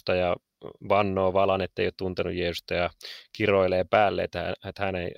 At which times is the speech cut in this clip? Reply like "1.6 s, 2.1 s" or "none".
none